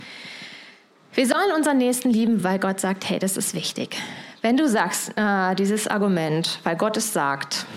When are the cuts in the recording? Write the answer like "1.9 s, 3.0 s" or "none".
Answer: none